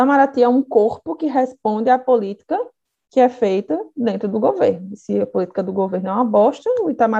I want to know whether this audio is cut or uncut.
uncut